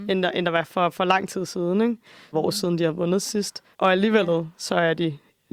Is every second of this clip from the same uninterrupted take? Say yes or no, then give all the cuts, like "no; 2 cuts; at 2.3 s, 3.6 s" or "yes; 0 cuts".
no; 2 cuts; at 2.3 s, 3.7 s